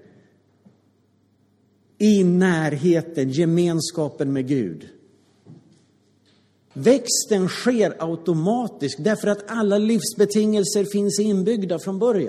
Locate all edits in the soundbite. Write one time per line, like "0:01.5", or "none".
0:06.7